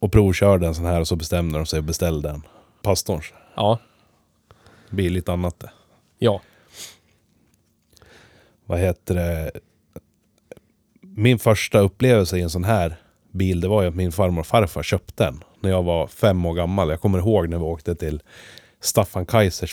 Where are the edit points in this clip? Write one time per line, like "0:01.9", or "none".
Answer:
0:02.8